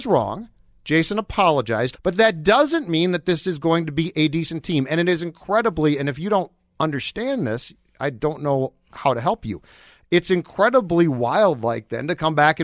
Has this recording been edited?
yes; 1 cut; at 1.9 s

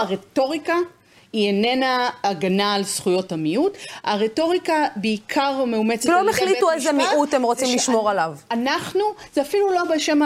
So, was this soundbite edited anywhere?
no; 0 cuts

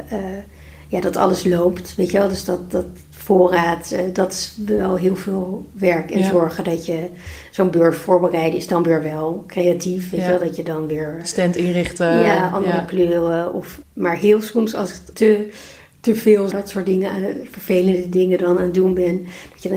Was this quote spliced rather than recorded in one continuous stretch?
yes; 3 cuts; at 13.8 s, 15.1 s, 16.5 s

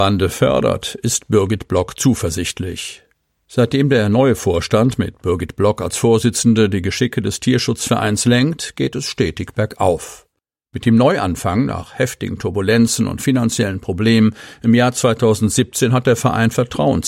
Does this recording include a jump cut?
no; 0 cuts

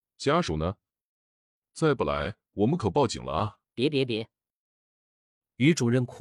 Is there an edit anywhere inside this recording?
yes; 2 cuts; at 1.6 s, 3.7 s

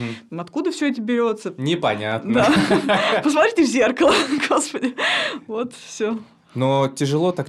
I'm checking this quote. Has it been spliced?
no; 0 cuts

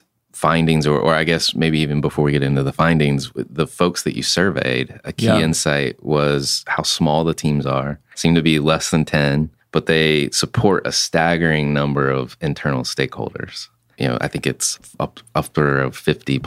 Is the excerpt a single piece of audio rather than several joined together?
yes; 0 cuts

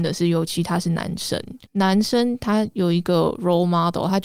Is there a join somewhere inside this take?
yes; 1 cut; at 1.7 s

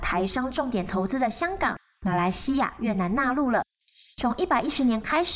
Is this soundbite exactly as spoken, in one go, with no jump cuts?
no; 1 cut; at 4.1 s

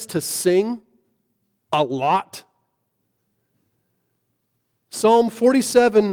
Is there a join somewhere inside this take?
no; 0 cuts

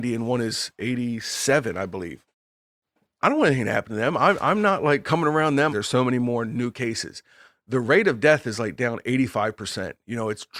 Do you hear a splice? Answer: yes; 2 cuts; at 3.2 s, 5.7 s

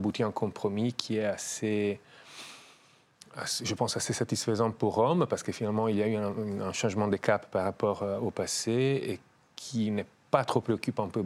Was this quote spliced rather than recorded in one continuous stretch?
no; 0 cuts

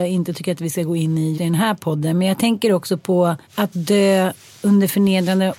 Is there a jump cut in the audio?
yes; 2 cuts; at 1.4 s, 3.4 s

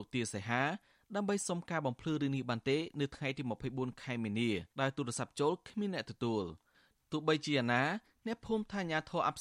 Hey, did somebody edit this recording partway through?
yes; 1 cut; at 4.7 s

